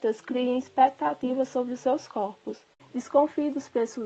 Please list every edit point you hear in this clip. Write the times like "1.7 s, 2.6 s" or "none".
2.8 s